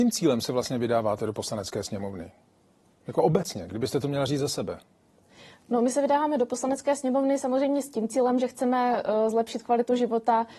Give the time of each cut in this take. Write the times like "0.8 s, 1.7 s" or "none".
none